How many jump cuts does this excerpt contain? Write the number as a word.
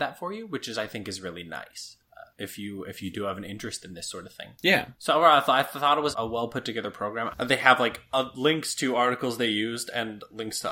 two